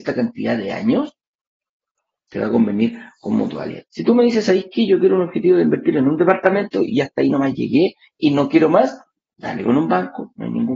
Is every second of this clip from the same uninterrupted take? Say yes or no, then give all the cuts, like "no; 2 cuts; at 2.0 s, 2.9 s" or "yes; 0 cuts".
no; 2 cuts; at 3.8 s, 9.2 s